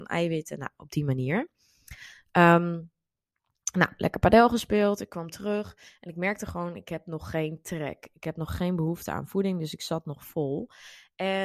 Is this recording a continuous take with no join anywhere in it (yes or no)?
yes